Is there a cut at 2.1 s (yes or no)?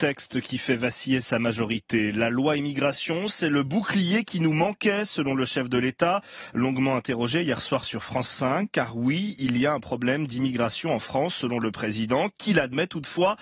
no